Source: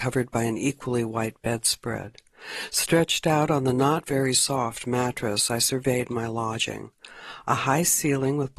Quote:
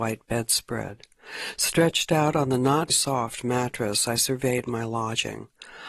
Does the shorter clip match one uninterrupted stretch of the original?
no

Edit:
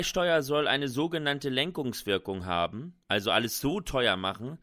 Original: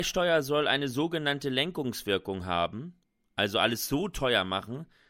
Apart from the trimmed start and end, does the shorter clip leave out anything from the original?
yes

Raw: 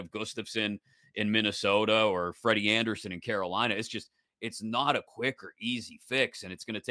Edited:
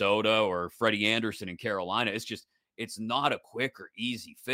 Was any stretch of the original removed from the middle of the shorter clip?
no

